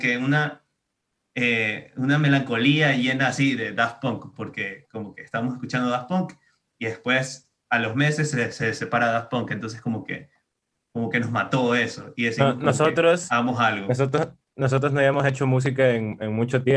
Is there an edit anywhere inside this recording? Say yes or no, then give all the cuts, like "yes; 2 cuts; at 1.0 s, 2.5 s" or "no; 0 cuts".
no; 0 cuts